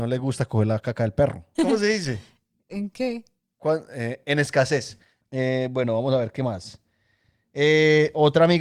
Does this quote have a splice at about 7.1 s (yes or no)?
no